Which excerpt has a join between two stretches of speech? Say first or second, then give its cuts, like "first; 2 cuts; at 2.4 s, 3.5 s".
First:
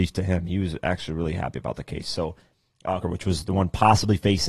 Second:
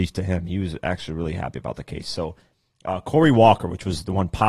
first; 1 cut; at 3.0 s